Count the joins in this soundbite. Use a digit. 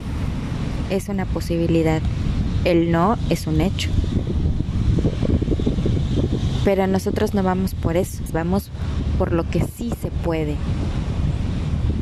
1